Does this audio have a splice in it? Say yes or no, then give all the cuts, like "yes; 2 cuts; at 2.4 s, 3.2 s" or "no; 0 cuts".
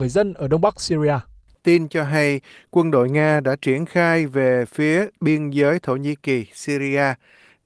no; 0 cuts